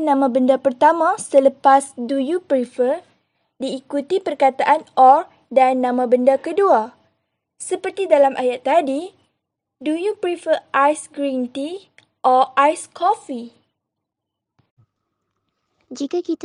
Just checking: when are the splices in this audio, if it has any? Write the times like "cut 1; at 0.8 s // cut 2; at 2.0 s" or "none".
none